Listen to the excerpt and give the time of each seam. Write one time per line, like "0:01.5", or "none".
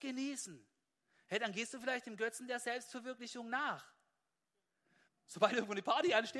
0:05.1